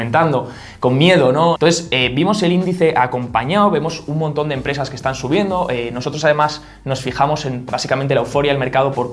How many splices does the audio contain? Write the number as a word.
one